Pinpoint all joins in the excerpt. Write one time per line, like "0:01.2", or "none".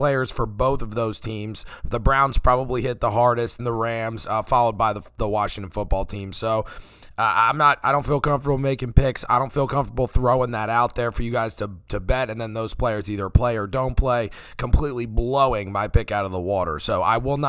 0:03.6